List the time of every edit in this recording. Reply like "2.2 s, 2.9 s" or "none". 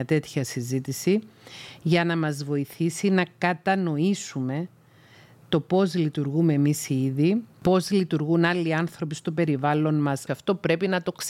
10.3 s